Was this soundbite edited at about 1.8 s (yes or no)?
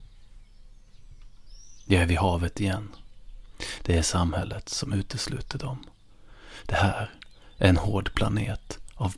no